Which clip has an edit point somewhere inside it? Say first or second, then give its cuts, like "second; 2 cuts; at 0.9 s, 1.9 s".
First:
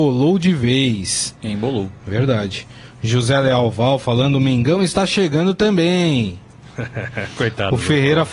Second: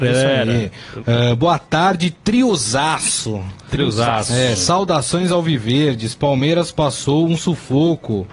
second; 1 cut; at 1.0 s